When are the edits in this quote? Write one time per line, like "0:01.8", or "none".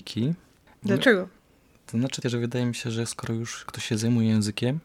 0:02.2